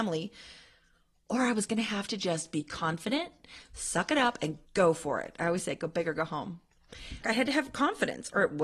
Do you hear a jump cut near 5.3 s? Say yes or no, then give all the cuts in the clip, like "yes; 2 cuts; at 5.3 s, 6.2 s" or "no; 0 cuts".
no; 1 cut; at 7.2 s